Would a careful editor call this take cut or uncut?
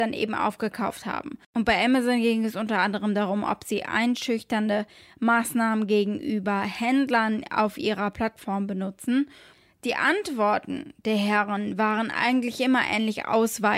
cut